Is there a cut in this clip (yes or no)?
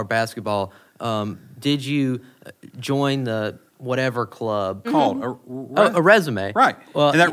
yes